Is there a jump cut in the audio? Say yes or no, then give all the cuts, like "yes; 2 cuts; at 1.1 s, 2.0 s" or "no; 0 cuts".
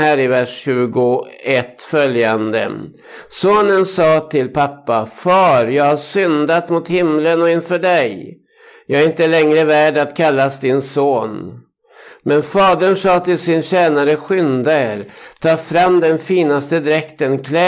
no; 0 cuts